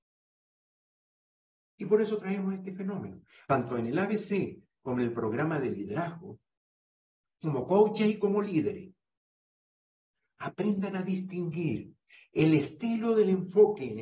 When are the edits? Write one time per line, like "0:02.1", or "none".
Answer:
0:03.4